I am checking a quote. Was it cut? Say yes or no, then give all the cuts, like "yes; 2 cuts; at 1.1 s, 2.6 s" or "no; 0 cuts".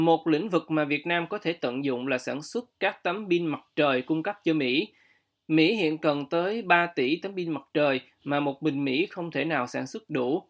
no; 0 cuts